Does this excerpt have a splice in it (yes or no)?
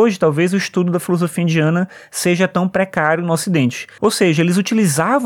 yes